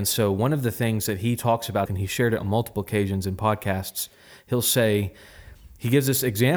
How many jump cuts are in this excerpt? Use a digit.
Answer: 1